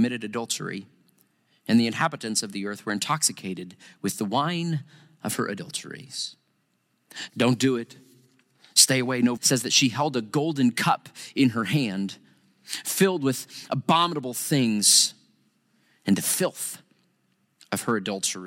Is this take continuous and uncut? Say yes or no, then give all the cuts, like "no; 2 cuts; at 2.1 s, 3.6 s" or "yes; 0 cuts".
no; 2 cuts; at 7.3 s, 9.4 s